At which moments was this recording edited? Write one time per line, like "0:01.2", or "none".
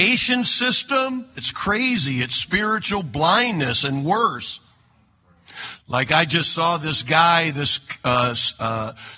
0:01.4
0:05.8